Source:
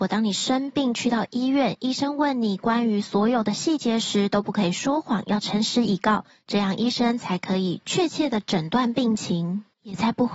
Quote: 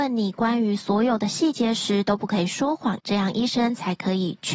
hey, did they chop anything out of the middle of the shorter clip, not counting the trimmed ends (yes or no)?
yes